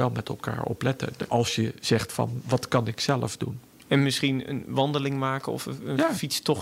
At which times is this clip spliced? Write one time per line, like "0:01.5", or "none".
none